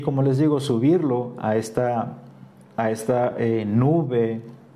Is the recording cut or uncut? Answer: uncut